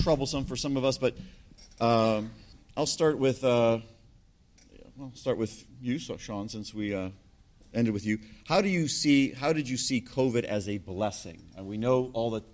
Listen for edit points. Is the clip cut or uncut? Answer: uncut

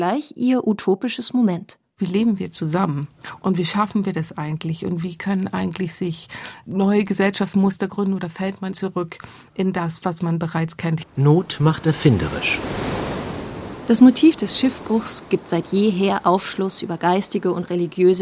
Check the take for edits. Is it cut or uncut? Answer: cut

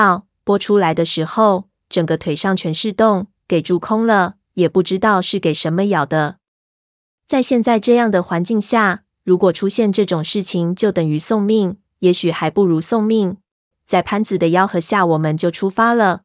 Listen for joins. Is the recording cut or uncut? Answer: cut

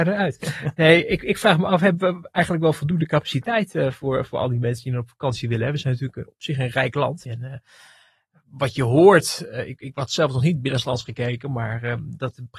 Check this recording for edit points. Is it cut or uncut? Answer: cut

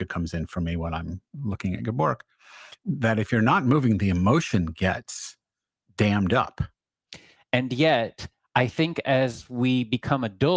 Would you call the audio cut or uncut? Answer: cut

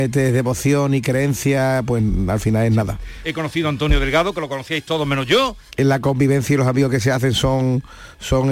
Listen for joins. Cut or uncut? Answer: cut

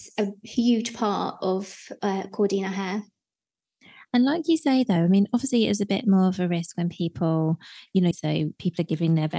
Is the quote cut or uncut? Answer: cut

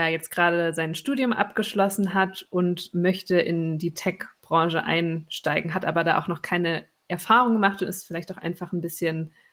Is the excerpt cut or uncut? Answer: uncut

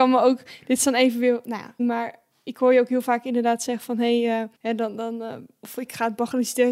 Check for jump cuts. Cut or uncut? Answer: cut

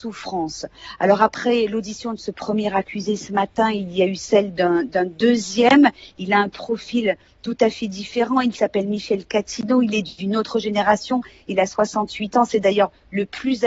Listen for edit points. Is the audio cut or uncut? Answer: uncut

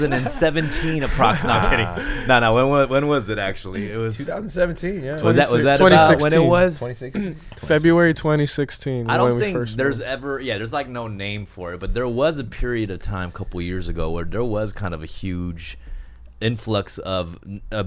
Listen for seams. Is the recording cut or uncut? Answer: uncut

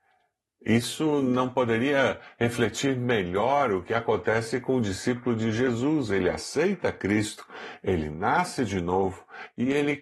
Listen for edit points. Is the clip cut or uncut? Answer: uncut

